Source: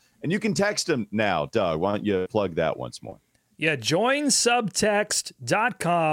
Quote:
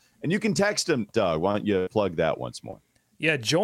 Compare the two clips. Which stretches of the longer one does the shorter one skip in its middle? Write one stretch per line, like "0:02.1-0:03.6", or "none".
0:01.1-0:01.5